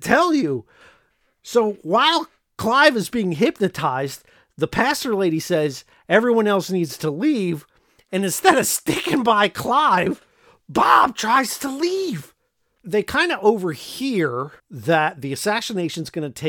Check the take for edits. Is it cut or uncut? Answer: cut